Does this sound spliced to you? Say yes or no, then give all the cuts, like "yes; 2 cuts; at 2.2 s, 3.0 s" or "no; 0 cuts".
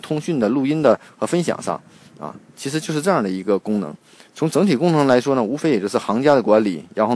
no; 0 cuts